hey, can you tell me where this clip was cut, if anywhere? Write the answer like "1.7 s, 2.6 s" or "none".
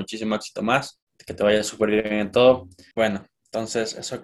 1.1 s, 2.9 s